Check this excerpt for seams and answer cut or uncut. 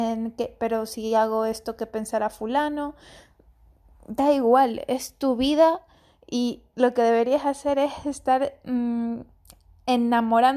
uncut